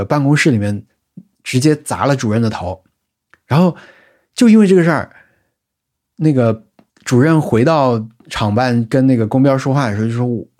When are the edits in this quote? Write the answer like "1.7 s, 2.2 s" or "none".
none